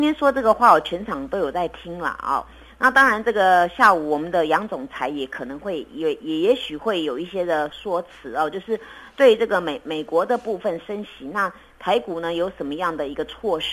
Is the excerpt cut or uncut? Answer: cut